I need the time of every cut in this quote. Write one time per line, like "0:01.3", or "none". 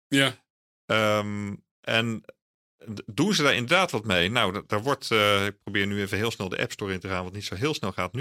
0:01.7